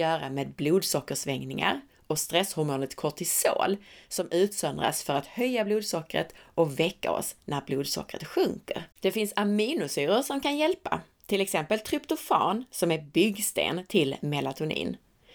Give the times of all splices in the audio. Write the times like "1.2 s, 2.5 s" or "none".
8.9 s